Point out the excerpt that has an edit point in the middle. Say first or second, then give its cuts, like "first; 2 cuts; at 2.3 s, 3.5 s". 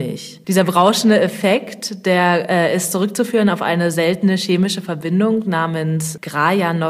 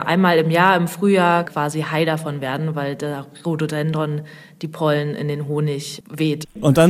second; 1 cut; at 1.4 s